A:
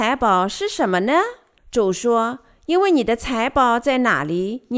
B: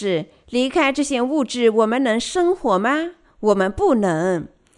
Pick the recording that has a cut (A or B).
A